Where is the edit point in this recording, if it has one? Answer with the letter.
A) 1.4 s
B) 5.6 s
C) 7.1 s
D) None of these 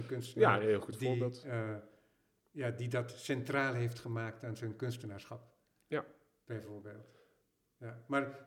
D